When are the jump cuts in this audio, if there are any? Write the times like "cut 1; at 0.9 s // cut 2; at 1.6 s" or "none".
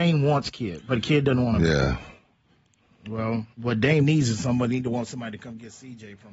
cut 1; at 3.5 s